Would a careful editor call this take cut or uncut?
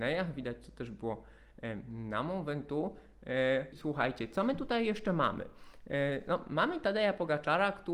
cut